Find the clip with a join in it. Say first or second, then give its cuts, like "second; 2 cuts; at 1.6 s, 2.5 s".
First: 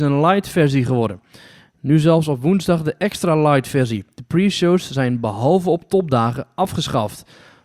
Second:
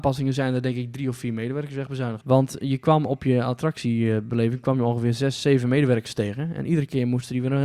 second; 1 cut; at 2.2 s